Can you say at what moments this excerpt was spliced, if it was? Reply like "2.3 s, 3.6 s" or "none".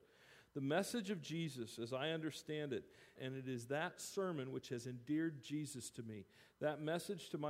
3.2 s

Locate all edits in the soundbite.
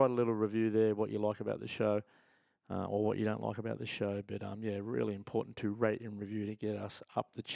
none

